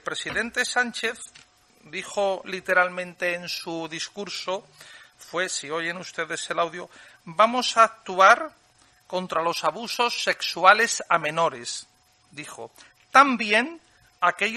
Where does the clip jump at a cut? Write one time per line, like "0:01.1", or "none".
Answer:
none